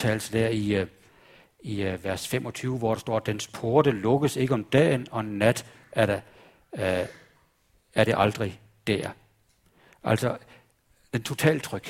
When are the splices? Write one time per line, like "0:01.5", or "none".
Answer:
none